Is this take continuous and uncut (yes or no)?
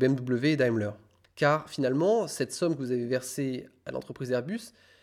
no